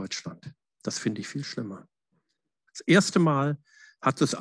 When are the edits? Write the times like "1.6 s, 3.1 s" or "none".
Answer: 2.7 s